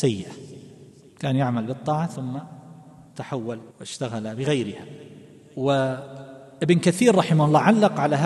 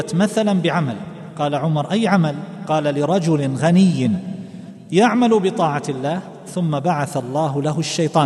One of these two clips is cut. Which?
first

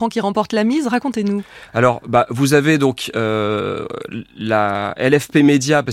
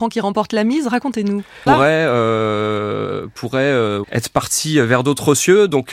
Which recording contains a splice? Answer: second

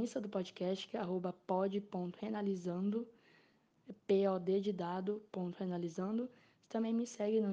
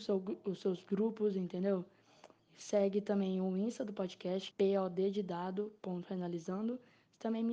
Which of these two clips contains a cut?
second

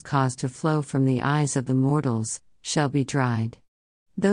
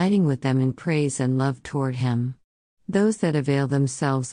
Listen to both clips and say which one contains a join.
second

